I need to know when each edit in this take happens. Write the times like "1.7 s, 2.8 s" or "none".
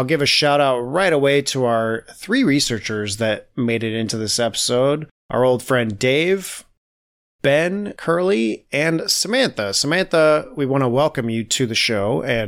none

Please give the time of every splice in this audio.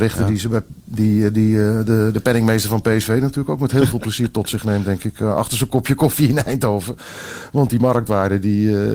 none

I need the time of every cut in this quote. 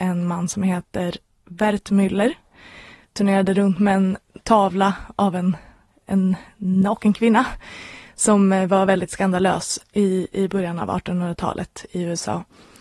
3.1 s

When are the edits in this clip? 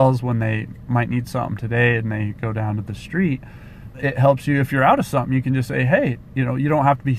3.9 s

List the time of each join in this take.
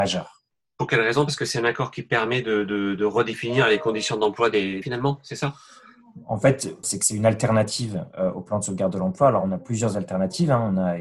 4.8 s, 6.8 s

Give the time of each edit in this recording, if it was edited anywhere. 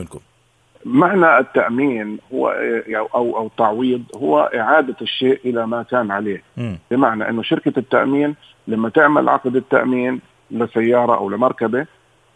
none

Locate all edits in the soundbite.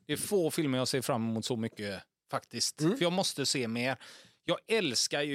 none

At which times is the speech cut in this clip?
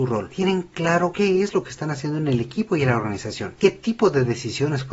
3.6 s

